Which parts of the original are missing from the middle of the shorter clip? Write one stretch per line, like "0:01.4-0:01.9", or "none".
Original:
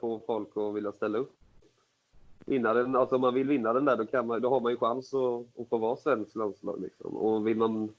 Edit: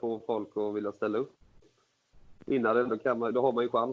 0:02.9-0:04.0